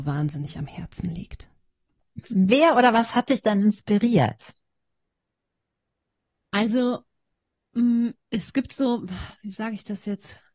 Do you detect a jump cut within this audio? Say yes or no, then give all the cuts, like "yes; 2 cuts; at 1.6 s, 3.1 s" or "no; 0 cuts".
no; 0 cuts